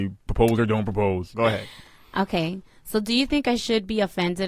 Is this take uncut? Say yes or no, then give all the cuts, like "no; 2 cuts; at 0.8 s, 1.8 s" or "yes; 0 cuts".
no; 1 cut; at 1.3 s